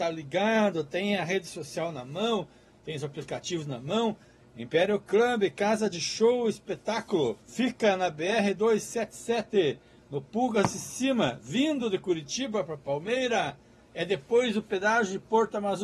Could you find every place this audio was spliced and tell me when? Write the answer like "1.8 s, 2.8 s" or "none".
4.4 s, 7.4 s